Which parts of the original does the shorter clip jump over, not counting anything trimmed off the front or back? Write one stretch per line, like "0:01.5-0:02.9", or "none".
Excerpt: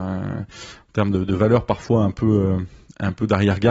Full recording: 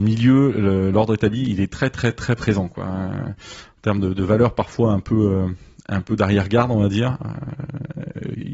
none